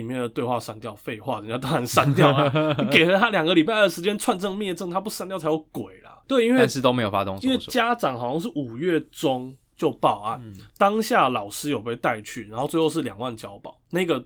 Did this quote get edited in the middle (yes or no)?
yes